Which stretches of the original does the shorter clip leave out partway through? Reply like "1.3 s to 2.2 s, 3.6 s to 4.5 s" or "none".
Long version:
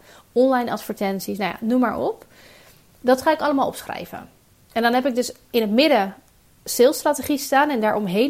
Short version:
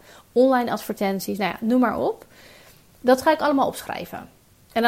none